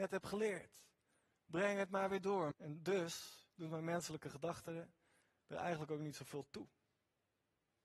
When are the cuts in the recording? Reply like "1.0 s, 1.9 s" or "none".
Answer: 2.5 s